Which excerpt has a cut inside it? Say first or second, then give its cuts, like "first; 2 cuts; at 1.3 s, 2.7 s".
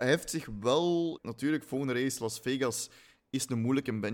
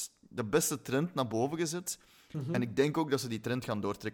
first; 1 cut; at 1.2 s